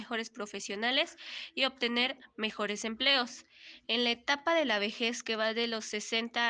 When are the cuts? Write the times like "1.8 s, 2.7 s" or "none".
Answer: none